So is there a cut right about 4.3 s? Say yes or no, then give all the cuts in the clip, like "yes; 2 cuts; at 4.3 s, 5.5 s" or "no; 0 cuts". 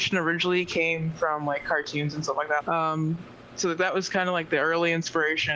no; 1 cut; at 2.6 s